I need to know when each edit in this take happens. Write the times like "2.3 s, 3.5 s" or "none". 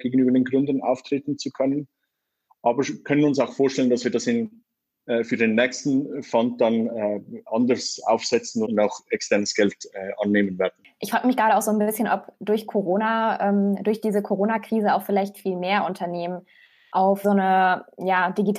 8.6 s, 17.2 s